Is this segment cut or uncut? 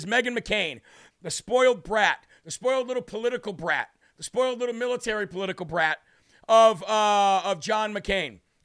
cut